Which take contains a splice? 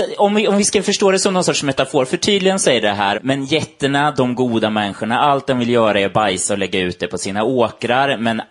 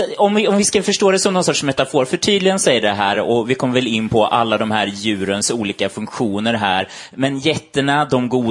first; 1 cut; at 3.1 s

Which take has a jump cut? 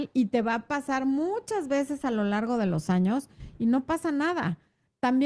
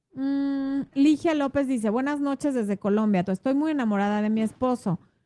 second; 2 cuts; at 0.9 s, 3.3 s

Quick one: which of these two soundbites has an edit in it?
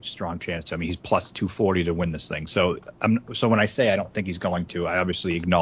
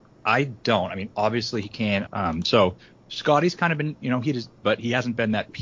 second; 2 cuts; at 2.1 s, 4.6 s

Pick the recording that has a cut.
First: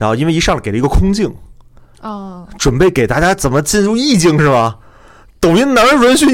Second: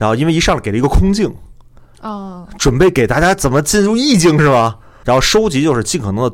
second; 1 cut; at 5.0 s

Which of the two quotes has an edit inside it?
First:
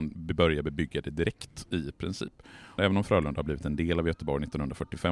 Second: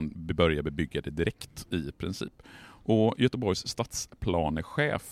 first; 1 cut; at 2.8 s

